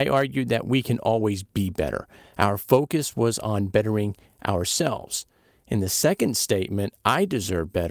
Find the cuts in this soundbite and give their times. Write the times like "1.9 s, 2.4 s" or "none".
none